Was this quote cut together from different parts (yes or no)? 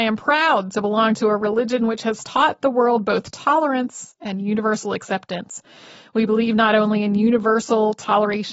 no